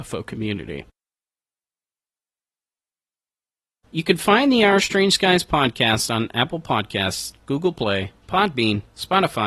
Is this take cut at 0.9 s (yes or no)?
no